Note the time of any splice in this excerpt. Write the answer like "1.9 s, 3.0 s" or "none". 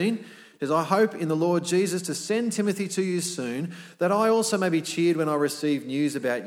none